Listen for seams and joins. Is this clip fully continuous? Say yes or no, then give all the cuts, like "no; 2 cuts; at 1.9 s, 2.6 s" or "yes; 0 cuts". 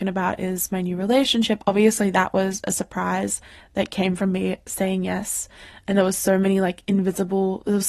yes; 0 cuts